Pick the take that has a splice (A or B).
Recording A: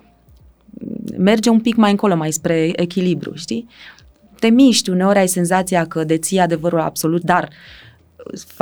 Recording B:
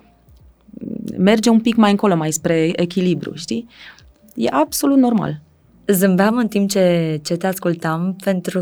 A